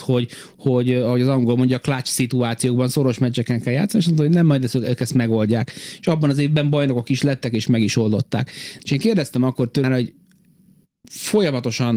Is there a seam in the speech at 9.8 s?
yes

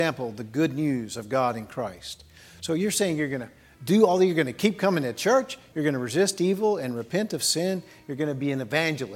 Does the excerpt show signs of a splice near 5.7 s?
yes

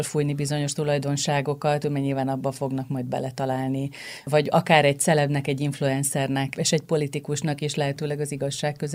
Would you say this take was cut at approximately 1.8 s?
yes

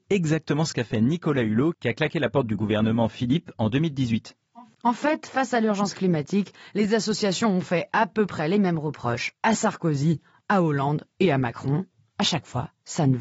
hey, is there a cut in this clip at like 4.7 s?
no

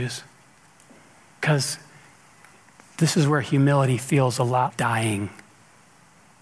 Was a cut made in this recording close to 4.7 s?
yes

